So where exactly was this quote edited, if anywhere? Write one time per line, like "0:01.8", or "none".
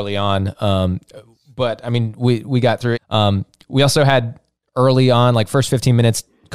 0:03.0